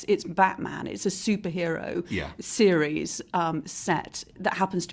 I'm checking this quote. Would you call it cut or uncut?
uncut